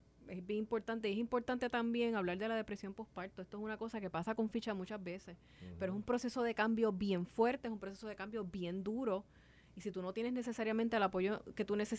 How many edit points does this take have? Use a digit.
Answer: 0